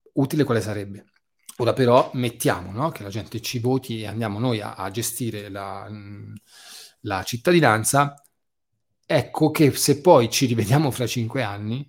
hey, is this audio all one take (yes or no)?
no